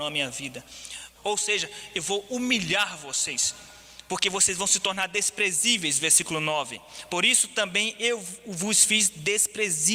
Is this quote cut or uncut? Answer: cut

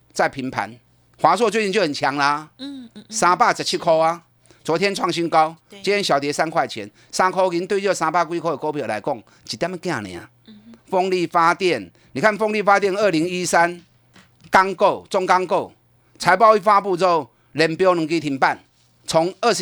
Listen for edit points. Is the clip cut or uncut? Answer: cut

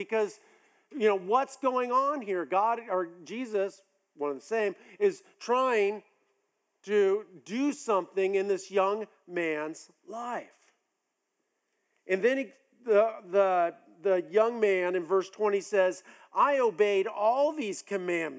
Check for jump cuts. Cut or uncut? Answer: uncut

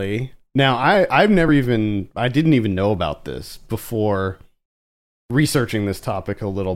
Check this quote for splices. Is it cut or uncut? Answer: uncut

